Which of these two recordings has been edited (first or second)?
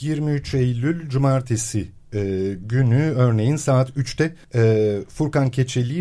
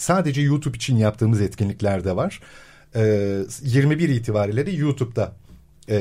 first